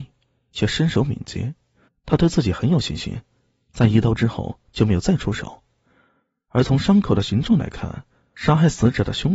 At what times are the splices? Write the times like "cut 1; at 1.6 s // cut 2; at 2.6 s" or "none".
cut 1; at 1.9 s